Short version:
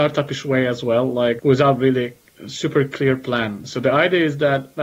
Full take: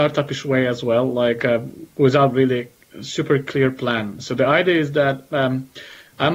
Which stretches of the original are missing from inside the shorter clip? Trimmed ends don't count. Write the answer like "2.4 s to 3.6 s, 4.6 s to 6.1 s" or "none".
1.4 s to 1.9 s